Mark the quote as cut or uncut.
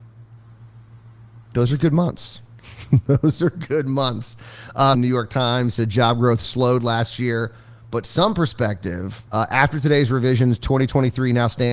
cut